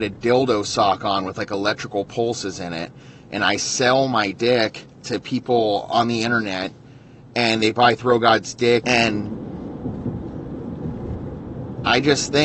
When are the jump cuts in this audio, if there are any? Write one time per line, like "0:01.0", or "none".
0:08.8